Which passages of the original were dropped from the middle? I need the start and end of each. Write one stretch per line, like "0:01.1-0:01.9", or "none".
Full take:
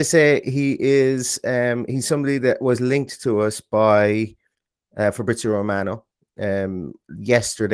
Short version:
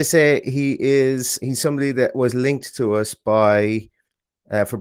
0:01.4-0:01.9